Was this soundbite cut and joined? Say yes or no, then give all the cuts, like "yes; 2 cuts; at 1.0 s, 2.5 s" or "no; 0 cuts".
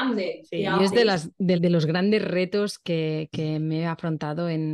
yes; 1 cut; at 1.5 s